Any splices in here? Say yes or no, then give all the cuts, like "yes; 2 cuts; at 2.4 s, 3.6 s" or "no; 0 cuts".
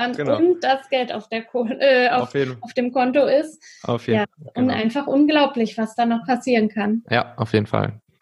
yes; 1 cut; at 4.2 s